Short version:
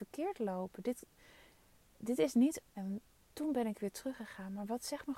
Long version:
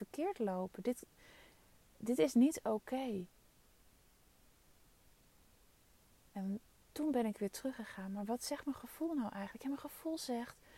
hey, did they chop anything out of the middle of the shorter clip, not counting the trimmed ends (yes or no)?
yes